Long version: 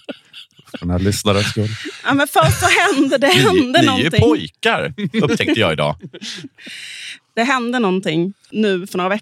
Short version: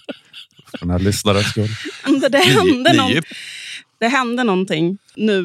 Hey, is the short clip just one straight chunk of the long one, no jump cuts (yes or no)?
no